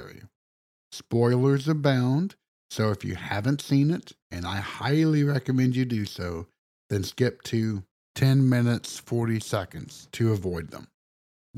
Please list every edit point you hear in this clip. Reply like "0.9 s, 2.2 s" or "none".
none